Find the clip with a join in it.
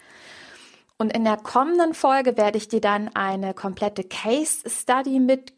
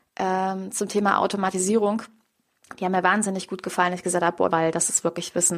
second; 1 cut; at 4.5 s

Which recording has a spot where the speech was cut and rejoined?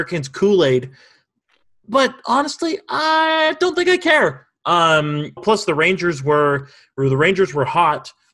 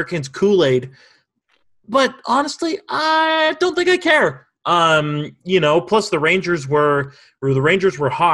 first; 1 cut; at 5.4 s

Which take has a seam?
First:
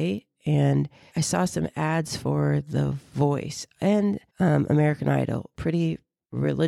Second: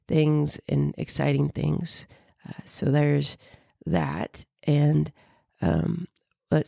first; 3 cuts; at 1.1 s, 4.3 s, 5.5 s

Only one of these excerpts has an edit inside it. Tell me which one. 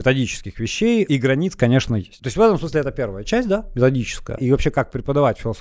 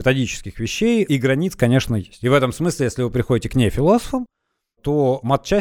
first; 2 cuts; at 2.2 s, 4.4 s

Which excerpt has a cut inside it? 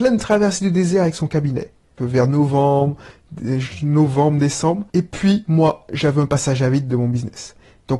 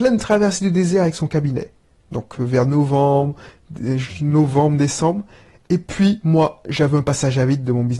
first; 2 cuts; at 2.0 s, 4.9 s

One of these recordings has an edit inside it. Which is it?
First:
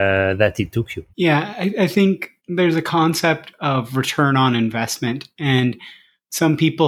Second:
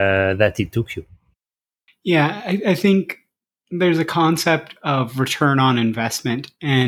first; 2 cuts; at 1.1 s, 2.4 s

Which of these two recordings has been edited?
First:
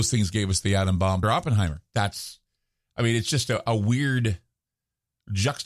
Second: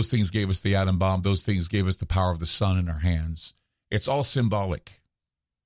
first; 1 cut; at 1.2 s

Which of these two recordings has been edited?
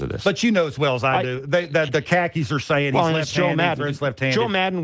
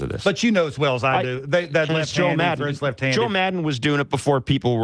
second; 1 cut; at 1.9 s

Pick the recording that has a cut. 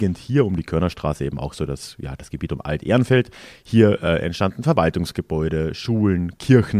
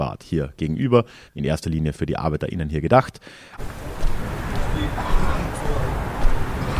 second; 2 cuts; at 1.3 s, 3.6 s

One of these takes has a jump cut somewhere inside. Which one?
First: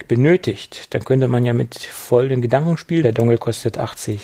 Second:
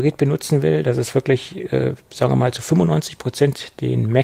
first; 1 cut; at 3.0 s

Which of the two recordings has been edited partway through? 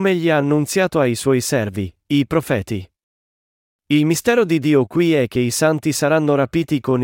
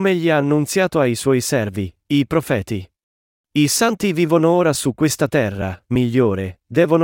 second; 2 cuts; at 3.4 s, 5.9 s

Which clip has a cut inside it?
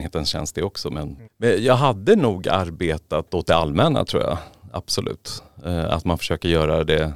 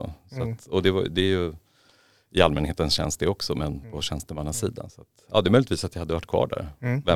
first; 1 cut; at 1.3 s

